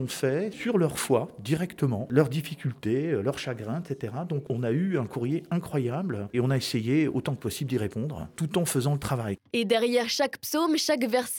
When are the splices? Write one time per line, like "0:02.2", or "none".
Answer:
none